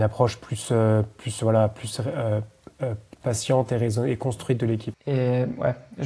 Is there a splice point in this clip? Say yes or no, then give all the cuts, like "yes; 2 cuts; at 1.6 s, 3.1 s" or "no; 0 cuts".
yes; 1 cut; at 4.9 s